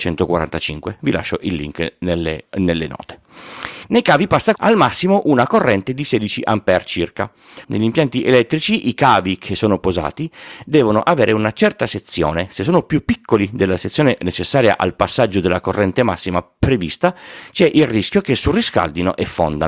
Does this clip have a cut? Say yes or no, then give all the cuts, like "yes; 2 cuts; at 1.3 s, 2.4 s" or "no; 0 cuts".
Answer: yes; 2 cuts; at 4.6 s, 7.6 s